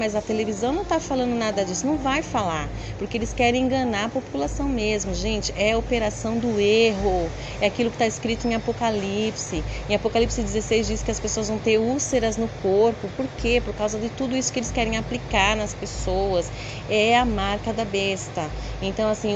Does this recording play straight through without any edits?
yes; 0 cuts

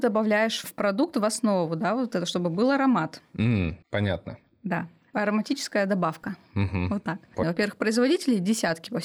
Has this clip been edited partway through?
yes; 2 cuts; at 3.8 s, 7.4 s

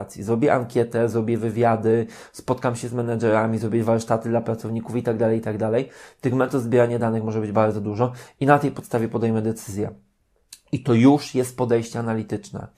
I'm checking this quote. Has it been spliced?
no; 0 cuts

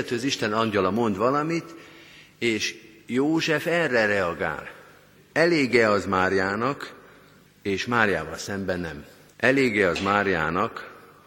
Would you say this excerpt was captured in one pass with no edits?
no; 3 cuts; at 5.2 s, 7.5 s, 9.3 s

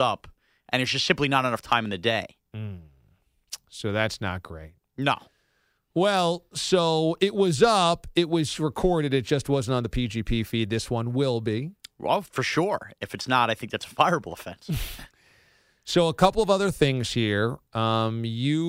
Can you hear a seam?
no; 0 cuts

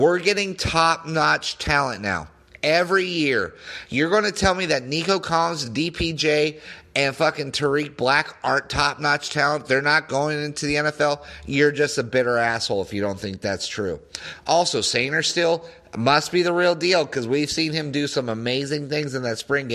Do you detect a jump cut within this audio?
no; 0 cuts

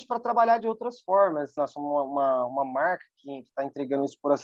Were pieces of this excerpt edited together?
yes; 1 cut; at 1.6 s

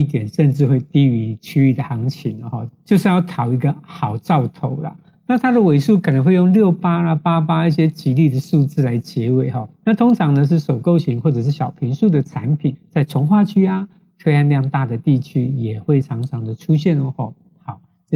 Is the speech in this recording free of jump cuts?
yes; 0 cuts

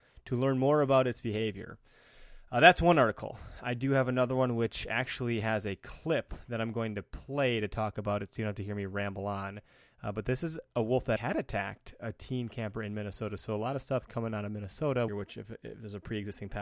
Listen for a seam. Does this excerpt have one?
yes; 2 cuts; at 11.2 s, 15.1 s

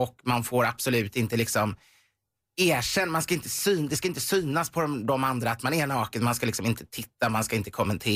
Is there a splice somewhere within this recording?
no; 0 cuts

